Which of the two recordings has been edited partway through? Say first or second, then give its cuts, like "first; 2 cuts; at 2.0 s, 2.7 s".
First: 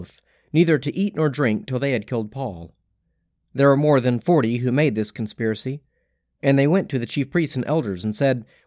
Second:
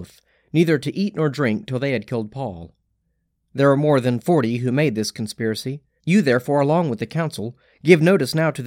second; 1 cut; at 6.0 s